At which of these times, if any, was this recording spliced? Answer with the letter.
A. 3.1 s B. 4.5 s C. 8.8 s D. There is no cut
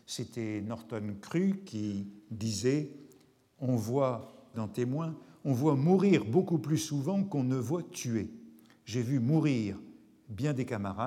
B